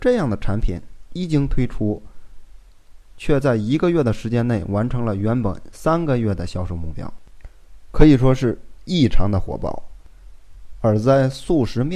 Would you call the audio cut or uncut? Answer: uncut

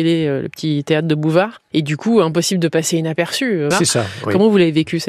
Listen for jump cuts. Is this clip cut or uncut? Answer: cut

